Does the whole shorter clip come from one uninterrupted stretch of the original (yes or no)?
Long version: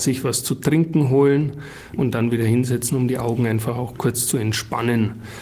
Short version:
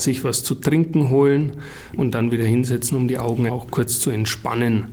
no